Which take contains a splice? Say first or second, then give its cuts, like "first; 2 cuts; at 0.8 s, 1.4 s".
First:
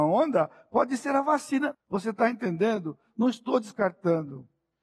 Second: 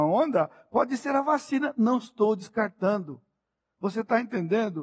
first; 1 cut; at 1.7 s